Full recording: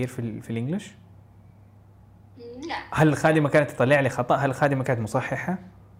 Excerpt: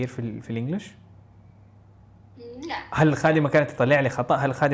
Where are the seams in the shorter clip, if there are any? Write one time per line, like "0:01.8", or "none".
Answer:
none